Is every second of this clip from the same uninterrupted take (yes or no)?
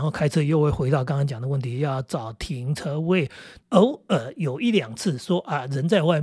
no